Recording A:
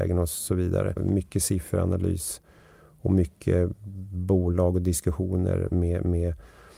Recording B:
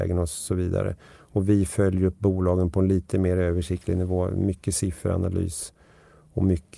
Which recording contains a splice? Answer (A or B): A